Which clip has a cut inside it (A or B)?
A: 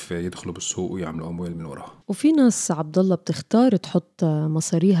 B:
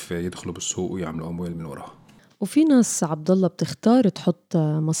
A